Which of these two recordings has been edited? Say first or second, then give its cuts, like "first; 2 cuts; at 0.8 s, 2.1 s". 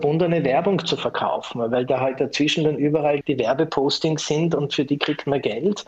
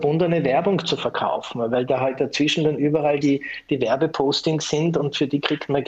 first; 1 cut; at 3.2 s